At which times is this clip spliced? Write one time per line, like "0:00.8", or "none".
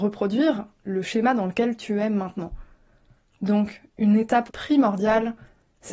0:04.5